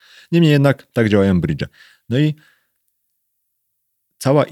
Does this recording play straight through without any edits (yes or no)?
yes